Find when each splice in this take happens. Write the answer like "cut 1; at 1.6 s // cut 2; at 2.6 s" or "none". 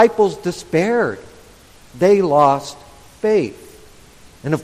cut 1; at 1.8 s

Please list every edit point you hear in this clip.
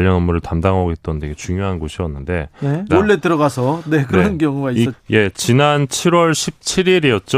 cut 1; at 2.9 s // cut 2; at 4.9 s

